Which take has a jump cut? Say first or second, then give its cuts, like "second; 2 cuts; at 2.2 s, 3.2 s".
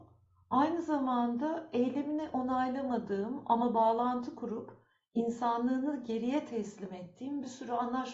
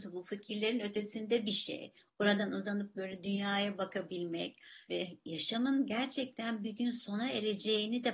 second; 1 cut; at 4.9 s